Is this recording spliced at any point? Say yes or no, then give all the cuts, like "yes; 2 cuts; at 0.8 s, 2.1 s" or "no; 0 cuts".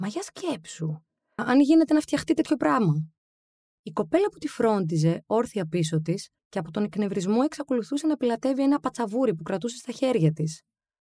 yes; 2 cuts; at 1.4 s, 6.4 s